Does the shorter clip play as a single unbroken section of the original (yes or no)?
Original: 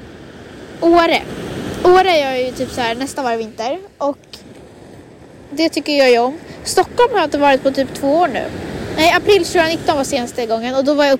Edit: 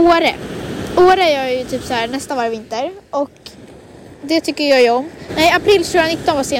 no